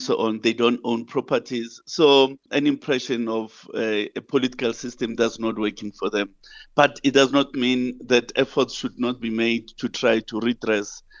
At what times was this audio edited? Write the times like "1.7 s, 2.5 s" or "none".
2.5 s